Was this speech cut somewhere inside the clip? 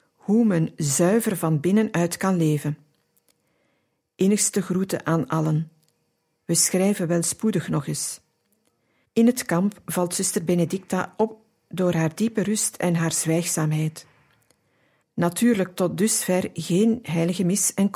yes; 2 cuts; at 9.0 s, 15.0 s

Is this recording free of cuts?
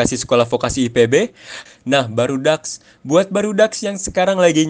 no; 1 cut; at 1.7 s

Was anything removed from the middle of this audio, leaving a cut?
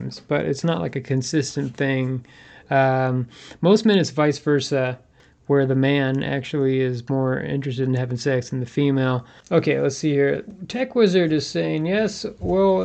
no; 0 cuts

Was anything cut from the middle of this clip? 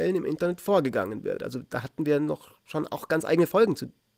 no; 0 cuts

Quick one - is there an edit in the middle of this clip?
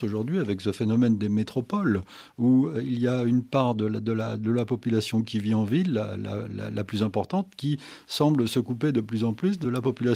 no; 0 cuts

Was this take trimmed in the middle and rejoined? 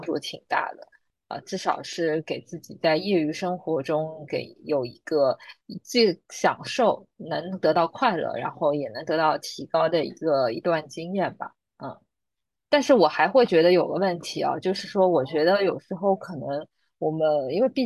no; 0 cuts

